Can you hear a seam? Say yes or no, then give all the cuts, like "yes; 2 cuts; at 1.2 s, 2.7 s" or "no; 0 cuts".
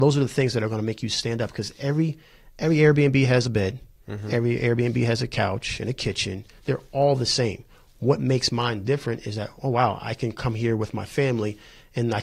no; 0 cuts